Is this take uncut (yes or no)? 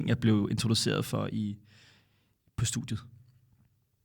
yes